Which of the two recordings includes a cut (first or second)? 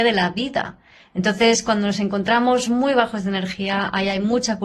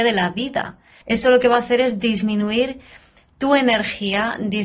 second